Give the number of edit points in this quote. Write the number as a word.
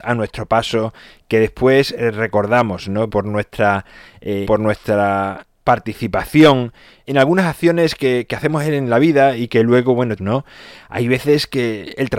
three